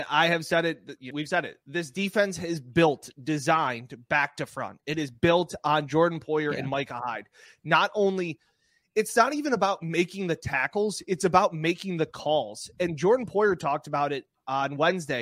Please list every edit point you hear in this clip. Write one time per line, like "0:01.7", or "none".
0:01.1